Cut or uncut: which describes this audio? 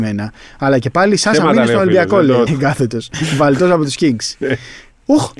cut